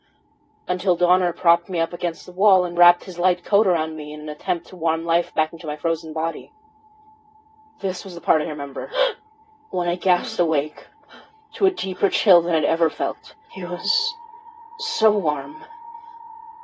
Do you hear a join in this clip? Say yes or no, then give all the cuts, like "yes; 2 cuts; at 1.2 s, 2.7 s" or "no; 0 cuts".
yes; 1 cut; at 13.5 s